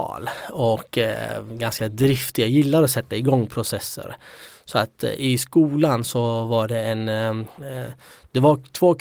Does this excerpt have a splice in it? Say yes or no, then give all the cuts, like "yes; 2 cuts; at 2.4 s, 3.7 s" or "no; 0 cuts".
no; 0 cuts